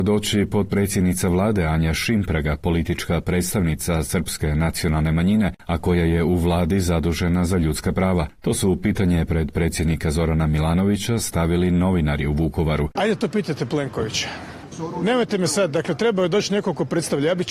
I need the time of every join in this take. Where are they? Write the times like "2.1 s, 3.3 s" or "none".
13.0 s

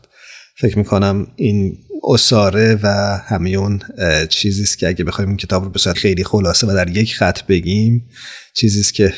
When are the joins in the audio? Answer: 5.9 s

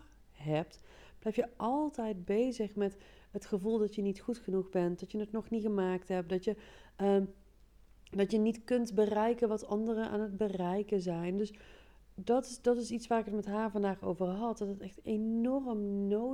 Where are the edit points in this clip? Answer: none

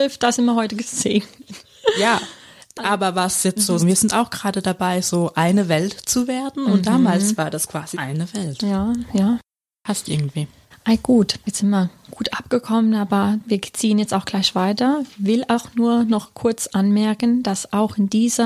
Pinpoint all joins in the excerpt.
3.8 s, 7.9 s, 10.7 s

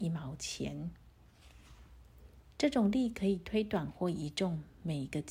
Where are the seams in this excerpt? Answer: 2.5 s

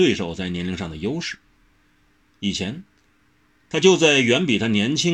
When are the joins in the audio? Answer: none

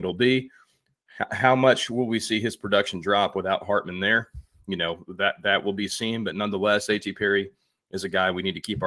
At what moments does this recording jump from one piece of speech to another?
none

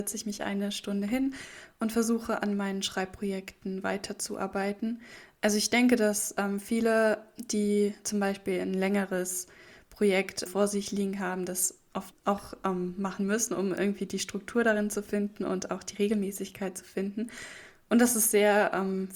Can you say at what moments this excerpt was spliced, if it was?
10.5 s

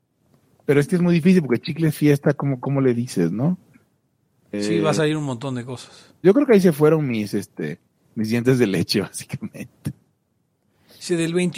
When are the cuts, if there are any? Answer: 6.2 s

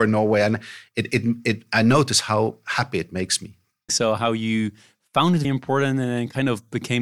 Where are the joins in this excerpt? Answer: 3.9 s, 5.4 s

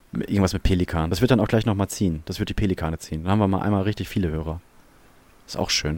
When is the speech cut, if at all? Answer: none

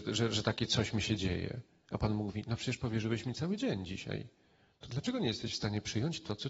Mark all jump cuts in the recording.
none

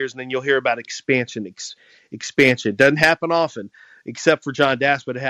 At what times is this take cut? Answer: none

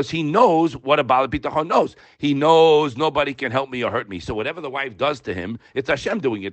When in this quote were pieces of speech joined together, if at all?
none

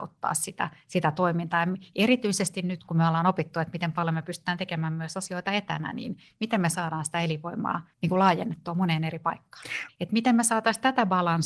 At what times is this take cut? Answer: 7.9 s, 9.9 s

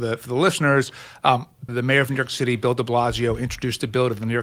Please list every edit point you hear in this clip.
1.7 s

